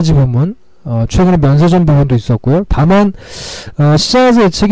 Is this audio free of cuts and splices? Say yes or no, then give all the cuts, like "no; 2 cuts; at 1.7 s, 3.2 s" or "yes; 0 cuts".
no; 1 cut; at 2.7 s